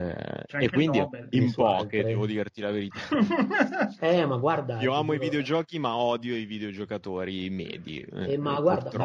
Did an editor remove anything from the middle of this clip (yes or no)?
yes